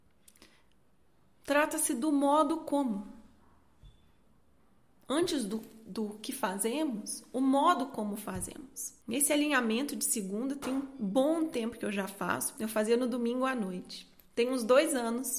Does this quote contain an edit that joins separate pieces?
yes; 2 cuts; at 9.0 s, 12.6 s

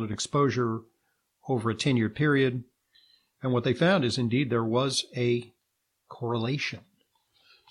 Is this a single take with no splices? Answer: yes; 0 cuts

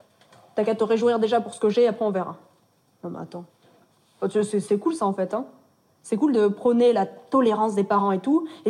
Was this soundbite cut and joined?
no; 0 cuts

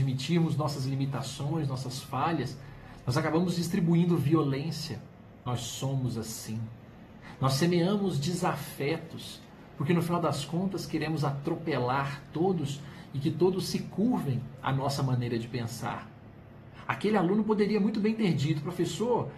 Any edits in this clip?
yes; 1 cut; at 16.9 s

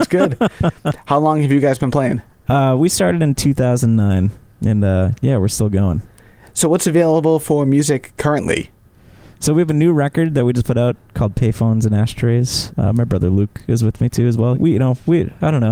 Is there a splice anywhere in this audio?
yes; 2 cuts; at 12.7 s, 14.5 s

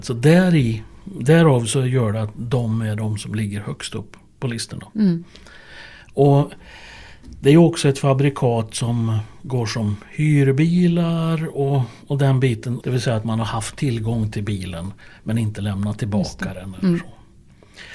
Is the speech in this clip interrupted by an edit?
yes; 1 cut; at 12.8 s

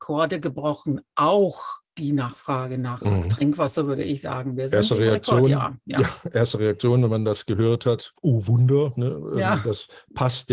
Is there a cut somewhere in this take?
no; 0 cuts

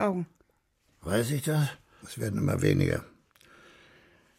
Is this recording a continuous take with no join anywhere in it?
no; 1 cut; at 2.0 s

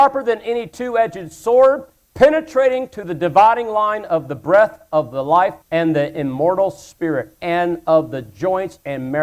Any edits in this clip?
yes; 1 cut; at 5.6 s

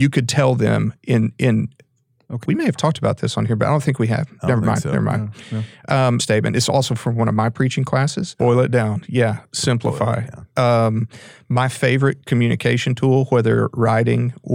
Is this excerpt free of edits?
no; 3 cuts; at 2.4 s, 6.2 s, 8.4 s

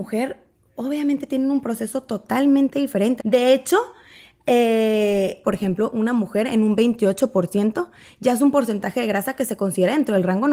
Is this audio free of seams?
no; 2 cuts; at 3.2 s, 5.4 s

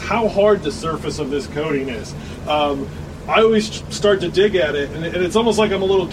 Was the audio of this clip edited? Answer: no; 0 cuts

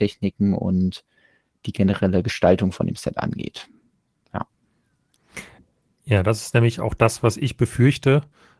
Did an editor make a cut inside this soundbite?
no; 0 cuts

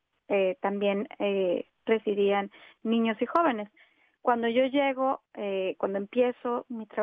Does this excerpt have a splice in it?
no; 0 cuts

